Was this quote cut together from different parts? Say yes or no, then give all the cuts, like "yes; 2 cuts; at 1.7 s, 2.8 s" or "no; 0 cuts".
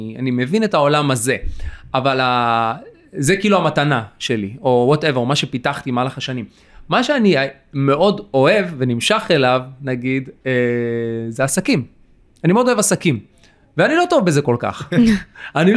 no; 0 cuts